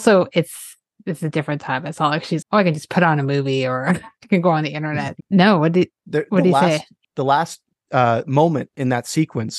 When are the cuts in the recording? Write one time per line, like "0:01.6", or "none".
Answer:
0:02.4
0:05.2